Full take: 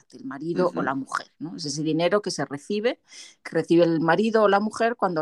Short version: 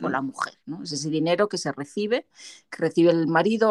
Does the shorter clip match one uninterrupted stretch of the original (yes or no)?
yes